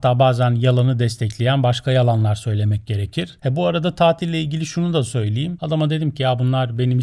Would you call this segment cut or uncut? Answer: cut